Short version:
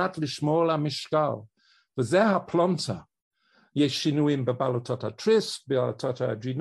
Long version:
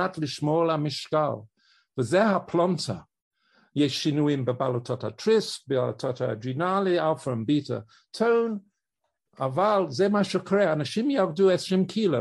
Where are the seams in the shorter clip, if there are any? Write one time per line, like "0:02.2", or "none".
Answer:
none